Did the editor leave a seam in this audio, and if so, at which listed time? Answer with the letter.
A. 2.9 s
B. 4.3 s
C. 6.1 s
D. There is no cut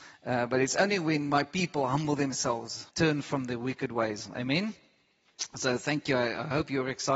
A